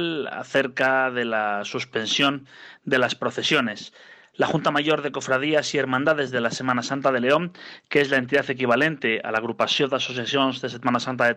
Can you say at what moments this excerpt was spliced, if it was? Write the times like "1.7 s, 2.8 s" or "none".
none